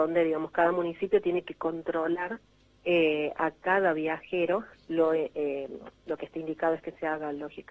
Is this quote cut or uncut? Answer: cut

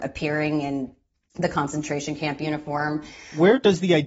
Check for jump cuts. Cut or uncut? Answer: uncut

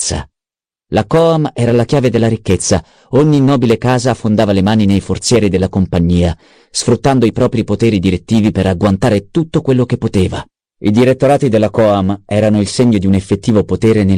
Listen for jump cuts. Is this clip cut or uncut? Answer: uncut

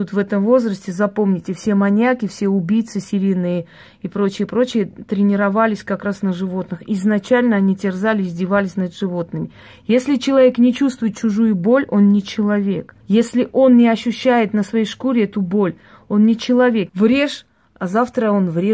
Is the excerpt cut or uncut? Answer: cut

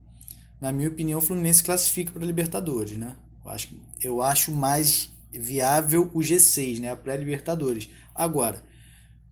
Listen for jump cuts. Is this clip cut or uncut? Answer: uncut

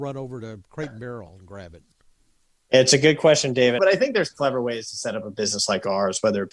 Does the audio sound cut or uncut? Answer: cut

